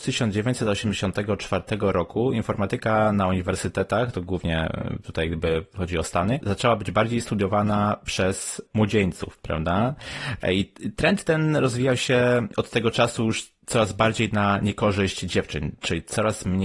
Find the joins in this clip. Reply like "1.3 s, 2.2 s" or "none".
10.4 s